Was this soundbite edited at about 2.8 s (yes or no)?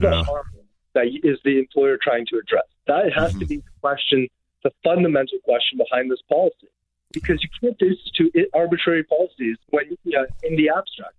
no